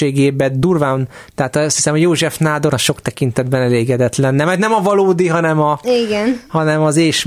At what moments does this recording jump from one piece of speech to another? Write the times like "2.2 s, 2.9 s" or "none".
1.3 s, 2.7 s